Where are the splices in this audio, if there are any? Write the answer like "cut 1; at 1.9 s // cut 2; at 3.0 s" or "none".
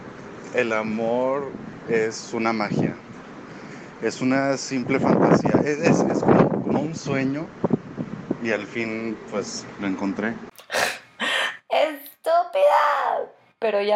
none